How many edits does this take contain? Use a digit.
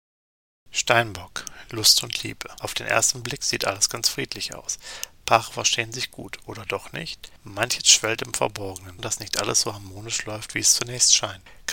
1